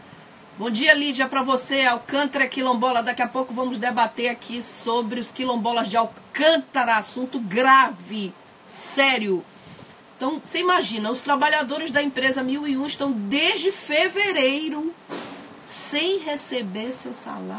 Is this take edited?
no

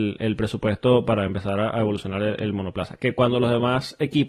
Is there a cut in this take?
no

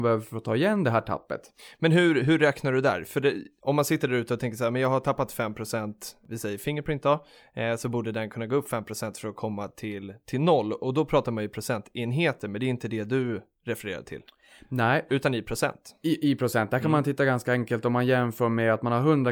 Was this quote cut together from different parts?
no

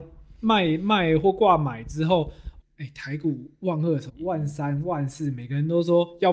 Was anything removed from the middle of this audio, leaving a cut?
yes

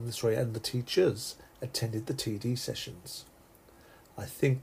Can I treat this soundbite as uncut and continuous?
yes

